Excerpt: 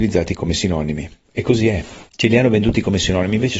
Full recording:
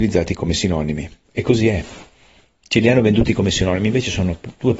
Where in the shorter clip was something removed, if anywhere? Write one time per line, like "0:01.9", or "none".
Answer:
0:02.1